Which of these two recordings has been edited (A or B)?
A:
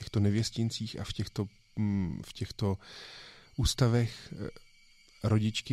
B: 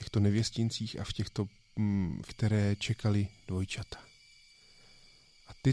B